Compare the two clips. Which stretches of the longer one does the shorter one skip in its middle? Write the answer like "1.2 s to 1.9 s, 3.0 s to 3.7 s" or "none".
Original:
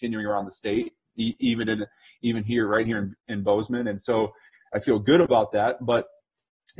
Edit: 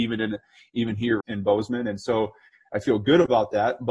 2.7 s to 3.2 s